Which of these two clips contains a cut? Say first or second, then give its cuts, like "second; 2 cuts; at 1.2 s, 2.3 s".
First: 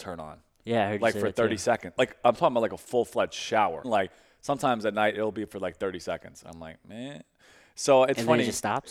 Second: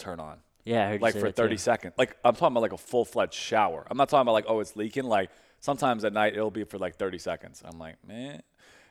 first; 1 cut; at 3.8 s